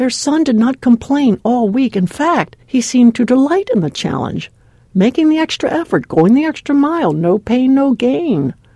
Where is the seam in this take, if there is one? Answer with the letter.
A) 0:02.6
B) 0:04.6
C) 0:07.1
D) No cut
A